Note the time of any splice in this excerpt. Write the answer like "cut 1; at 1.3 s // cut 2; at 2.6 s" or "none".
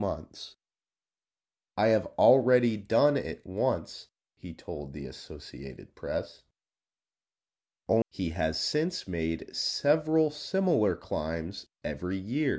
cut 1; at 4.3 s // cut 2; at 8.0 s